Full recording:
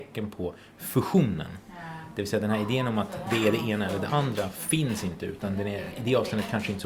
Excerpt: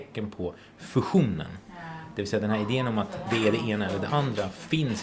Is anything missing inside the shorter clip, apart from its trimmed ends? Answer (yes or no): no